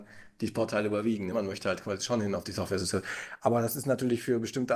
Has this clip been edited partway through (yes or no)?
no